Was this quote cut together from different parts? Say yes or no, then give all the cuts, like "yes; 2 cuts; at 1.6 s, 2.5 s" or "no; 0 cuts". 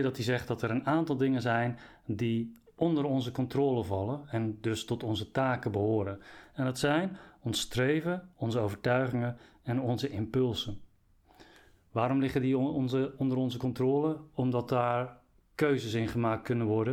yes; 1 cut; at 8.3 s